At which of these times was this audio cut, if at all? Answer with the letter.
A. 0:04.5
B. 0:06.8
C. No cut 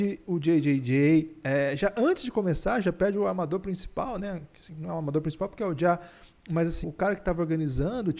B